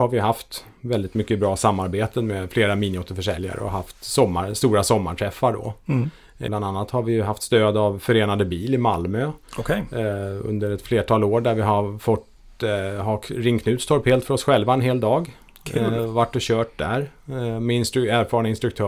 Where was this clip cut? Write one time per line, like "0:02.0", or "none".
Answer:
0:06.5